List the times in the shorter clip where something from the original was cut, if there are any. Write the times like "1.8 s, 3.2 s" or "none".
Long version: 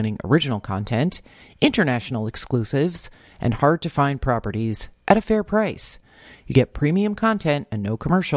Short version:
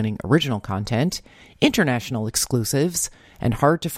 none